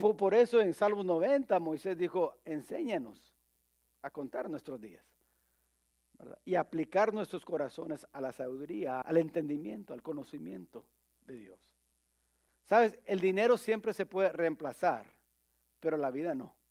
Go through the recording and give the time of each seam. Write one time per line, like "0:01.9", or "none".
0:09.0
0:12.5